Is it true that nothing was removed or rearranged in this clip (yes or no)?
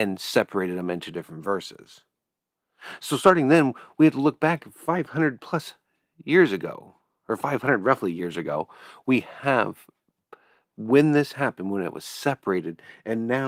yes